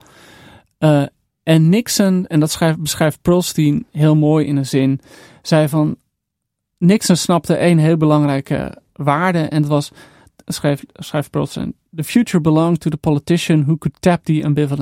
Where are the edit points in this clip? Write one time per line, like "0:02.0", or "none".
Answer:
none

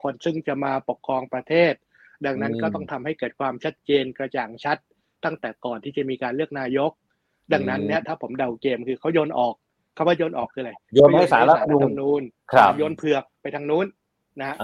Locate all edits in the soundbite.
0:12.4

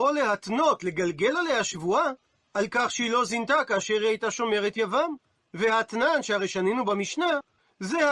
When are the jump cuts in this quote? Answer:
none

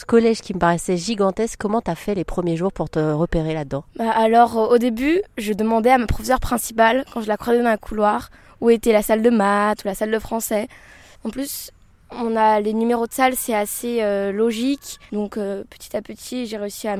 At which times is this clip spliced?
0:11.1
0:15.1

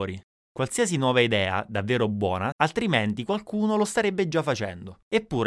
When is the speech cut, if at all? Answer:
0:02.5

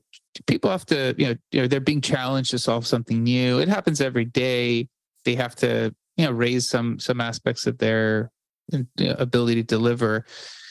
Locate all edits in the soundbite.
none

